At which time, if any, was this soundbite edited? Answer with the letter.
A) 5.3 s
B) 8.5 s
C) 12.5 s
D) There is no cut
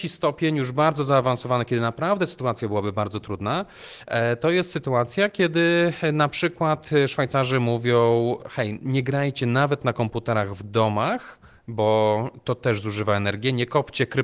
D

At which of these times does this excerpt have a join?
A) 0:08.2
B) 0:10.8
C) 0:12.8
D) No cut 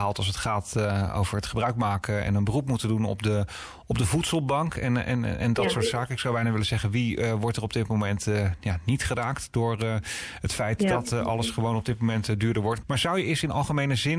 C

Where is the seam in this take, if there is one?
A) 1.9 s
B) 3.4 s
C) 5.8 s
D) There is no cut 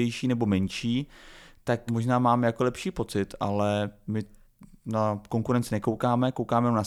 A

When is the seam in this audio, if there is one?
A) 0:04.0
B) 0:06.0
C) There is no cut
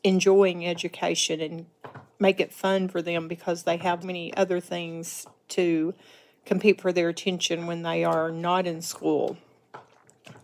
A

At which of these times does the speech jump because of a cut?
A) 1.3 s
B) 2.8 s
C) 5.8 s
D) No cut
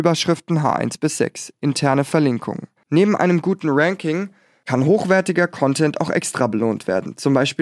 B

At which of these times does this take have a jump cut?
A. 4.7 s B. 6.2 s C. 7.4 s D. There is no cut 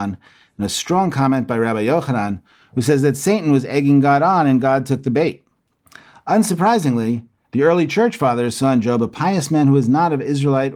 C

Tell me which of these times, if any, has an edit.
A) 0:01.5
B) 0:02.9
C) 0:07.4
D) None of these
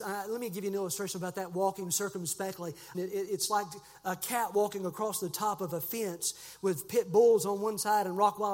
B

